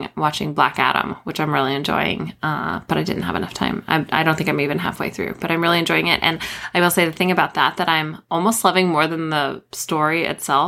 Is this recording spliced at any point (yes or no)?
no